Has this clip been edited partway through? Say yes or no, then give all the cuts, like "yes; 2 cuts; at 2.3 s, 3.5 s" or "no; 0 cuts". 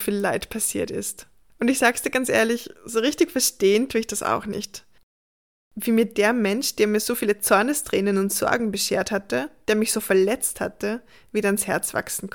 no; 0 cuts